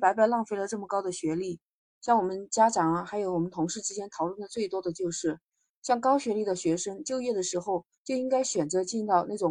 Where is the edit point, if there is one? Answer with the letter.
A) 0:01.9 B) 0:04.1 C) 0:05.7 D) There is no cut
A